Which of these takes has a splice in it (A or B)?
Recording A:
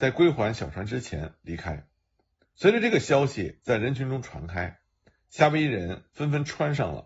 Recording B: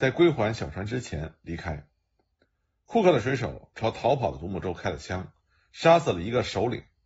A